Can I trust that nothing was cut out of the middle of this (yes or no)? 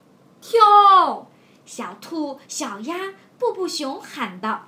yes